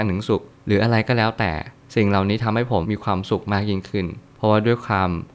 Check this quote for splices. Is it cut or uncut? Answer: cut